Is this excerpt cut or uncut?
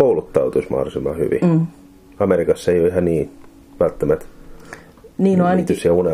uncut